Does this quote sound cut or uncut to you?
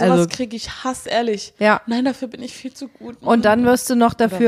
uncut